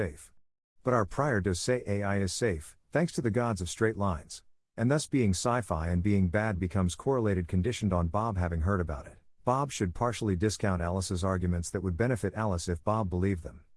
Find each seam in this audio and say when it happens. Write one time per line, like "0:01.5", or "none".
0:04.6
0:09.3